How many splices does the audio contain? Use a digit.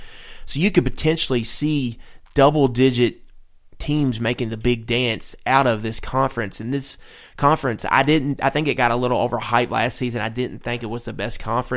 0